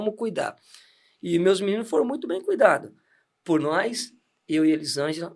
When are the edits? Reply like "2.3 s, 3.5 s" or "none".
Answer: none